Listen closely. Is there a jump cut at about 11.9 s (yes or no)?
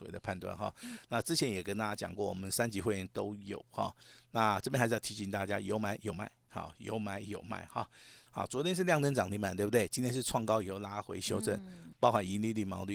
yes